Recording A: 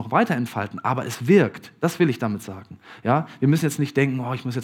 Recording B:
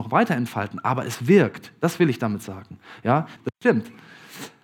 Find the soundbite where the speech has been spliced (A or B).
B